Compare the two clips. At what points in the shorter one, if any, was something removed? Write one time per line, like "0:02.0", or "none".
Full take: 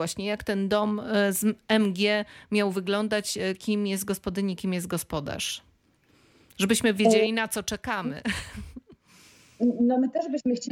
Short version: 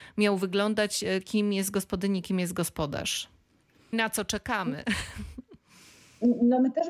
0:03.9